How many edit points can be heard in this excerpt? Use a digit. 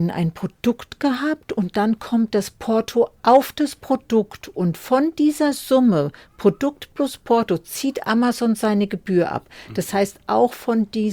0